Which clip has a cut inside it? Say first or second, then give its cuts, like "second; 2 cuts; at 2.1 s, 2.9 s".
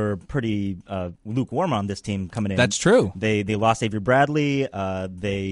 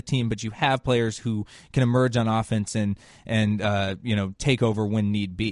first; 1 cut; at 1.2 s